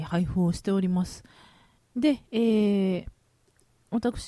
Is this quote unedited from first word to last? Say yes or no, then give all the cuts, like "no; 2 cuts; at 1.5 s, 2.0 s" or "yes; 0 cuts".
no; 1 cut; at 1.8 s